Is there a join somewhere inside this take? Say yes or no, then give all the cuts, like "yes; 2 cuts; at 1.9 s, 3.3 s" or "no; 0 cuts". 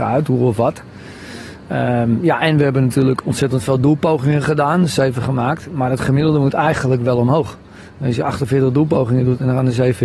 no; 0 cuts